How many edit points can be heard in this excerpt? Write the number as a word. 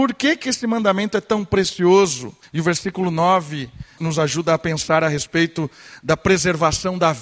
two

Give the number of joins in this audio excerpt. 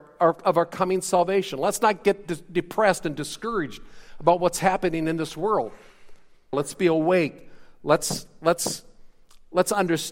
one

